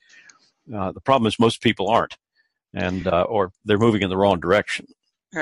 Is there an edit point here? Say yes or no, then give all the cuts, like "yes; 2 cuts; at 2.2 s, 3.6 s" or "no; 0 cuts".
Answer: no; 0 cuts